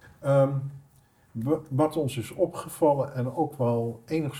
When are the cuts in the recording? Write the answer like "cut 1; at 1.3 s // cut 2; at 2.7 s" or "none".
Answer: none